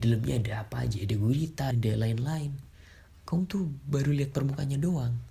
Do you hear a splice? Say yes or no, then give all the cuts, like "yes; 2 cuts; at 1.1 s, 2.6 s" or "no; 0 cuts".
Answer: yes; 1 cut; at 1.7 s